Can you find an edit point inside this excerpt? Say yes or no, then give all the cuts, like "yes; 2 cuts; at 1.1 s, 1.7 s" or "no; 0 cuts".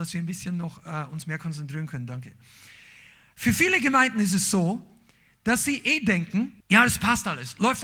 yes; 1 cut; at 6.6 s